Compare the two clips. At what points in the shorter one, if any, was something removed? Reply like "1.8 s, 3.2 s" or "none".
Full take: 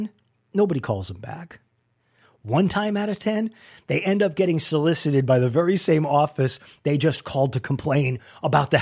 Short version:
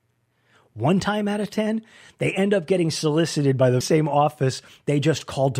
3.8 s